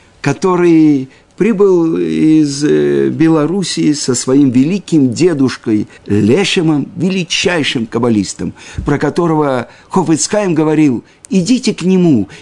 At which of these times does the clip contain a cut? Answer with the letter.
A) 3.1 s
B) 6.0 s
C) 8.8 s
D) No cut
B